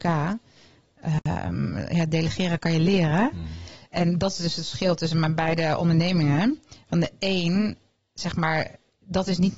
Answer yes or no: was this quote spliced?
no